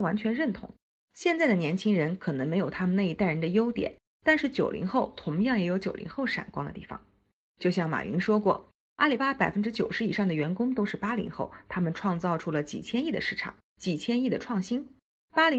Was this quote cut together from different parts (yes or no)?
yes